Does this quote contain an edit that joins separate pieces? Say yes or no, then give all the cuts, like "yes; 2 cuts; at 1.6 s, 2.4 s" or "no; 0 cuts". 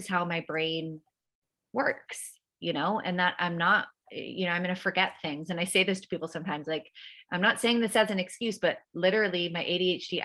no; 0 cuts